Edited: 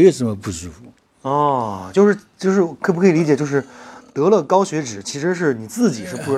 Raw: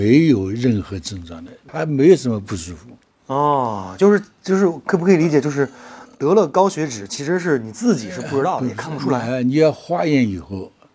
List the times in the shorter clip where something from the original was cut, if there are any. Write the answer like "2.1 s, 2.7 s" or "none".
none